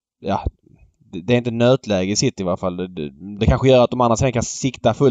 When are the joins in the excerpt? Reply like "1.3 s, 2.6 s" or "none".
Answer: 3.4 s

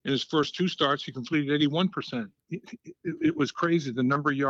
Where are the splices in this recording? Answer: 2.4 s

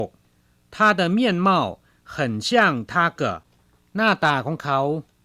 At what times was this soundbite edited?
3.2 s

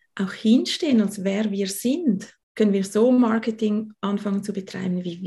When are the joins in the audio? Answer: 2.4 s

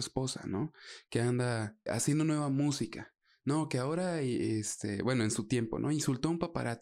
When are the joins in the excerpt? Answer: 1.9 s

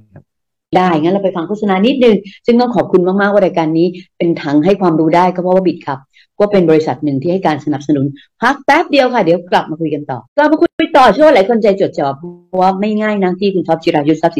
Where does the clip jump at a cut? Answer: 10.3 s, 11.9 s

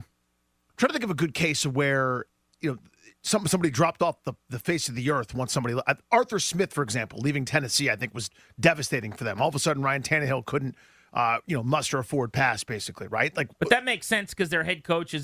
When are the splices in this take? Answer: none

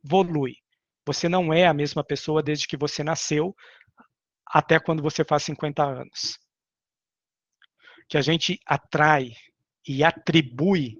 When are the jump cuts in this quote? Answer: none

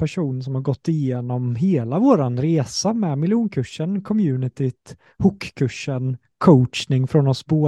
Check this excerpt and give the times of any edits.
none

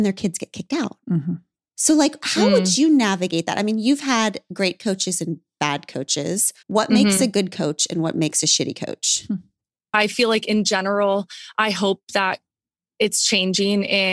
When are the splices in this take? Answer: 6.6 s

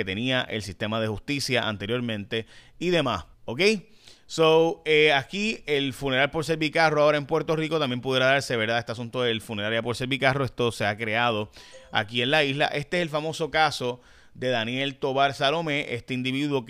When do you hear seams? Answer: 3.3 s

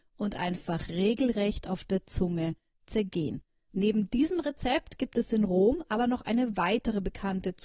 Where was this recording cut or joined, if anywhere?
3.7 s

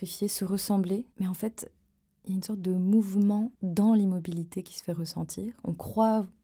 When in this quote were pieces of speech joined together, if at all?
1.1 s, 3.5 s

